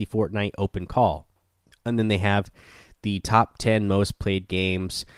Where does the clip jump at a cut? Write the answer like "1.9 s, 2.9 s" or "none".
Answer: 1.7 s

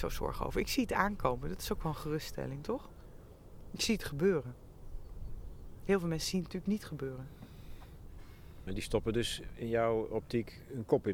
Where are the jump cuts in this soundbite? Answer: 8.7 s

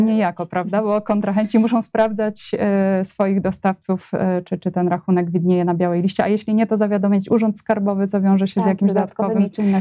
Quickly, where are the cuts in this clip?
none

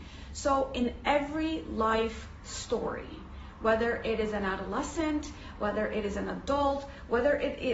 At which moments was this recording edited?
none

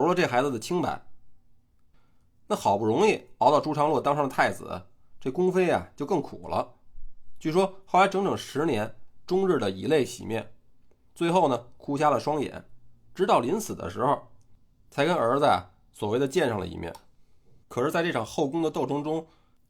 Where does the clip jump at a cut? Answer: 9.2 s, 17.6 s

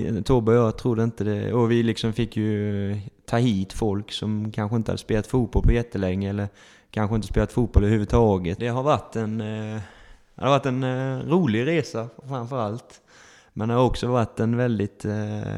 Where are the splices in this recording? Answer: 8.6 s

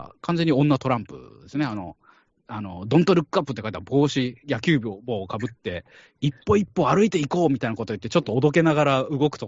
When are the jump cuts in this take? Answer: none

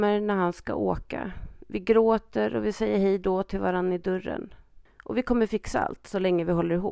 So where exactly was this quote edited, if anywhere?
4.9 s

